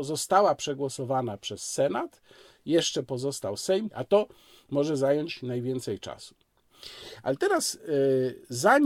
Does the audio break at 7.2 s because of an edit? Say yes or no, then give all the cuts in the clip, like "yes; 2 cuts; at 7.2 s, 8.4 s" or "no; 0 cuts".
no; 1 cut; at 3.9 s